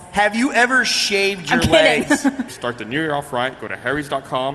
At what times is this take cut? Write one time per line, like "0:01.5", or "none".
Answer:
0:02.5